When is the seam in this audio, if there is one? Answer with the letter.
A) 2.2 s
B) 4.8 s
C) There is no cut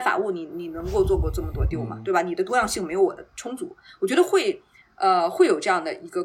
C